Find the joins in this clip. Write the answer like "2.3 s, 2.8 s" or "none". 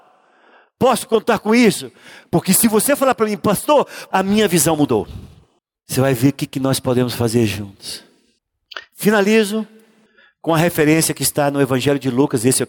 4.1 s, 5.7 s